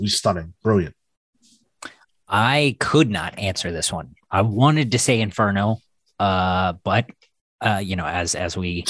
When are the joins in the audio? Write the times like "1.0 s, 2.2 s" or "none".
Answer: none